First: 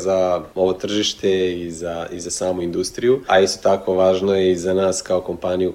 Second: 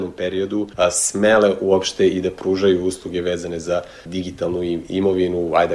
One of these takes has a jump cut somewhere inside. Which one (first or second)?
first